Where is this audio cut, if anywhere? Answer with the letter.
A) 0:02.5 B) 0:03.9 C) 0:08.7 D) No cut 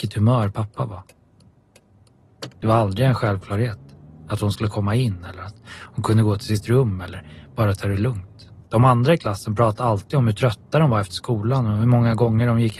C